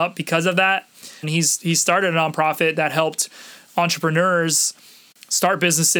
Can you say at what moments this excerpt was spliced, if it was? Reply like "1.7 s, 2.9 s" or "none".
1.2 s

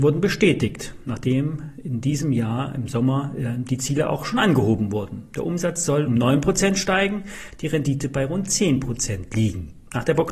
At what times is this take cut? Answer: 6.1 s

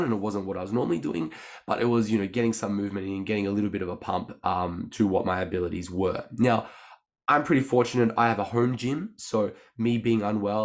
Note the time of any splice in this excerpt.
none

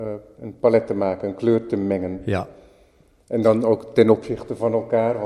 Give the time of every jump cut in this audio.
none

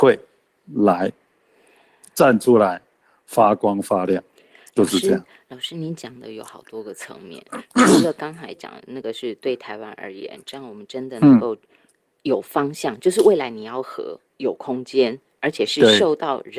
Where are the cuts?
none

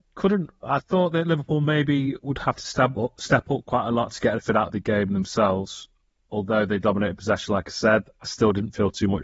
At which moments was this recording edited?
none

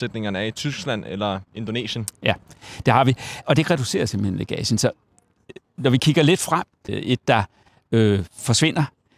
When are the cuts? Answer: 3.4 s, 6.9 s

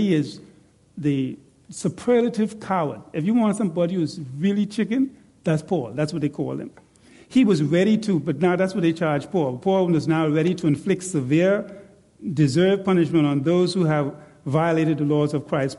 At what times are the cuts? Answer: none

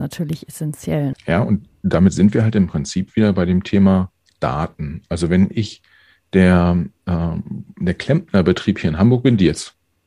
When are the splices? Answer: 1.1 s

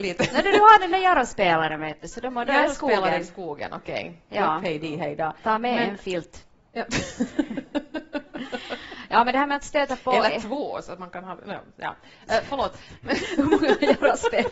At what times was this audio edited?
none

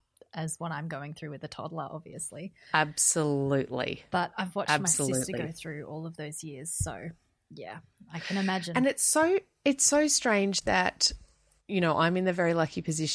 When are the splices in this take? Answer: none

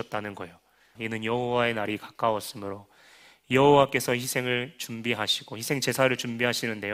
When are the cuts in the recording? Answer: 0.9 s

